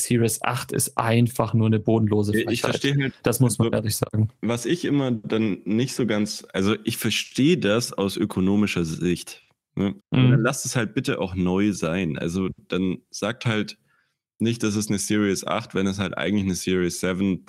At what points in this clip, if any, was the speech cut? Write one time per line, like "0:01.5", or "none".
0:10.0